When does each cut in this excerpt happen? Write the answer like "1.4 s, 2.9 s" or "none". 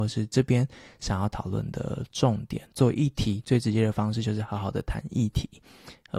2.7 s